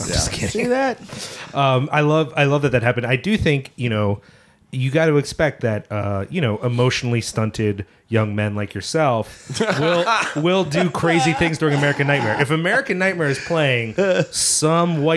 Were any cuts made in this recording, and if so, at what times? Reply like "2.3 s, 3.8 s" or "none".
none